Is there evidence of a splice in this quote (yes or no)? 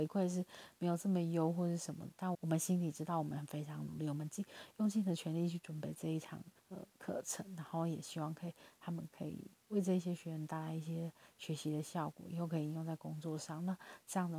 yes